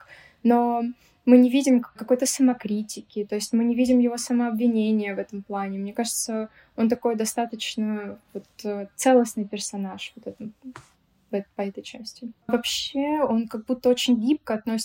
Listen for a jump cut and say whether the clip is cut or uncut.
cut